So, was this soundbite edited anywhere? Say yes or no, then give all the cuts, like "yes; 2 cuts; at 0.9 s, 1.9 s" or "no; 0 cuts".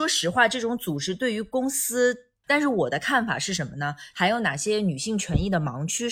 yes; 2 cuts; at 2.4 s, 4.1 s